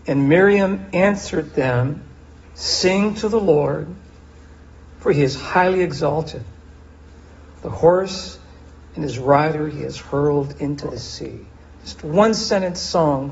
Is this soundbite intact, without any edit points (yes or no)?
no